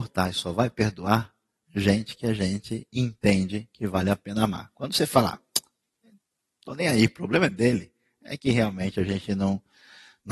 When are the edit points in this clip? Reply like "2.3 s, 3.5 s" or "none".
none